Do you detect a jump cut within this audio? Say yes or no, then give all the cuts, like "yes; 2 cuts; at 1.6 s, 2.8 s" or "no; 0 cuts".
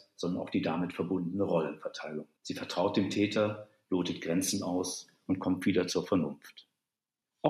yes; 2 cuts; at 2.4 s, 3.8 s